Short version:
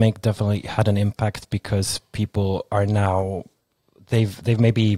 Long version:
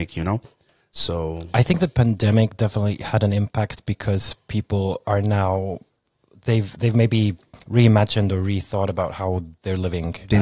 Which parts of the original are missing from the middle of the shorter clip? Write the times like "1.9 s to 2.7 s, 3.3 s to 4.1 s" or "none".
none